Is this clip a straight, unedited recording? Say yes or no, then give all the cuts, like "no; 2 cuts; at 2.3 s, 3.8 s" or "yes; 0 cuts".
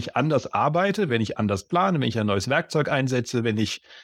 no; 1 cut; at 1.1 s